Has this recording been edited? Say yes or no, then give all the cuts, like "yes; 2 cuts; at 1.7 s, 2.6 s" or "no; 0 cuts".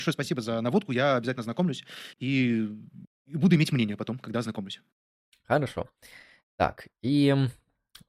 no; 0 cuts